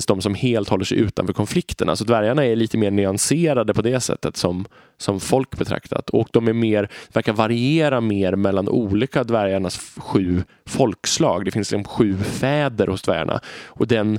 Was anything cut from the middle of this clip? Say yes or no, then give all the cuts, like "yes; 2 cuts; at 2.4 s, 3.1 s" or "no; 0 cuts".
no; 0 cuts